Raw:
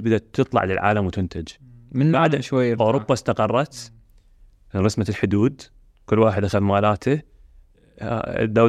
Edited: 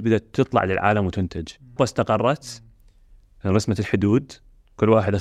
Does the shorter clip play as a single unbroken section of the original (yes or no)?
no